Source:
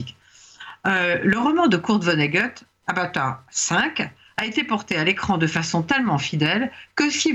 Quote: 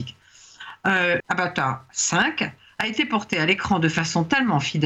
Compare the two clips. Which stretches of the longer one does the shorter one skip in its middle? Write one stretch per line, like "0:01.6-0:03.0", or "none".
0:01.2-0:02.8

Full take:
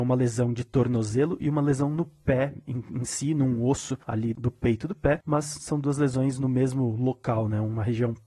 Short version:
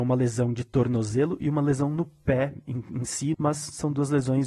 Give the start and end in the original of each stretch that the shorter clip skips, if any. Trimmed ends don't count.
0:03.3-0:05.2

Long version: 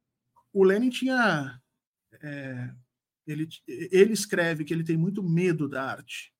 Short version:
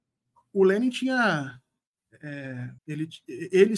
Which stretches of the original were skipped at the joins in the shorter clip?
0:02.8-0:03.2

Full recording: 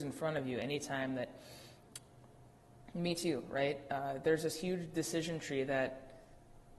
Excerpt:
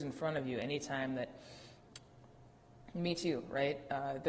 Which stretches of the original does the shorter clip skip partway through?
none

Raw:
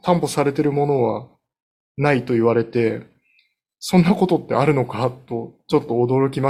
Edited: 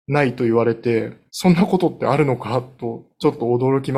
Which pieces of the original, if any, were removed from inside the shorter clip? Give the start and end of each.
0:03.2-0:03.8

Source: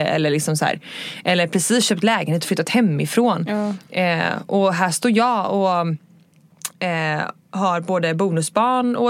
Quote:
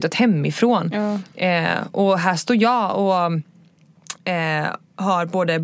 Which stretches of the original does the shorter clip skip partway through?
none

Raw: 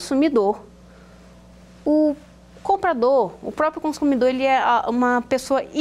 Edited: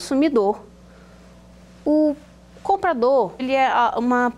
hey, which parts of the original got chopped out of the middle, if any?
0:03.4-0:04.3

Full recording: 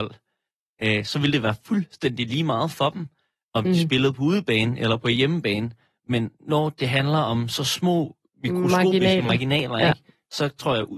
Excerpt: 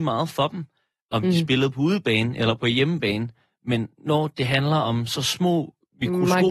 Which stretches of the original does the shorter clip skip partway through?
none

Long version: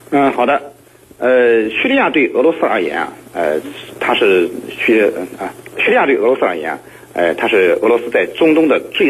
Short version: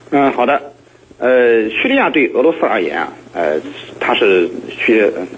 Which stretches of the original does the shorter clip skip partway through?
none

